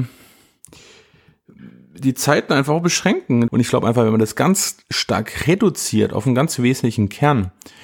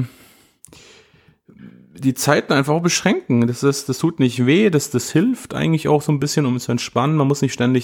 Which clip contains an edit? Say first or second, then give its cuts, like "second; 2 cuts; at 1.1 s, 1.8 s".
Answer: first; 1 cut; at 3.5 s